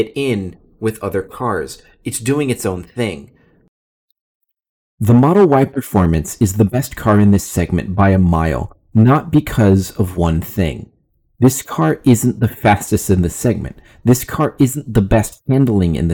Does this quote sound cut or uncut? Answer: uncut